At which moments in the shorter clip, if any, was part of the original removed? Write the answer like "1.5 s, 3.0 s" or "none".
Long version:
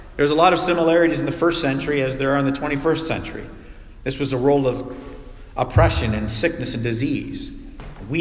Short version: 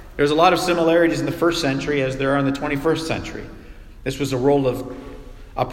none